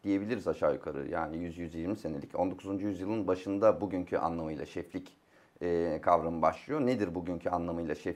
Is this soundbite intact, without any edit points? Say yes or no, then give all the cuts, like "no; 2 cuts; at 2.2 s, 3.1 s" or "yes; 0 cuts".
yes; 0 cuts